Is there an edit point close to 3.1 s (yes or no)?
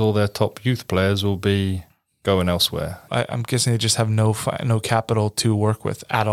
yes